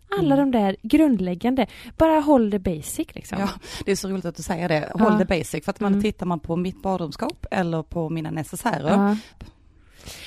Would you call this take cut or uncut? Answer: cut